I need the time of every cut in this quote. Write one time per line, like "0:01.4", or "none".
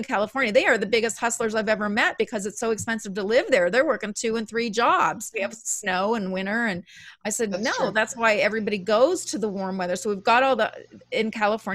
0:05.3